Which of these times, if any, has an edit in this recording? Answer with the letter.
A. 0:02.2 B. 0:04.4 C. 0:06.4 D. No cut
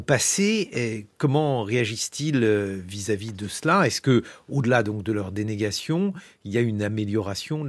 D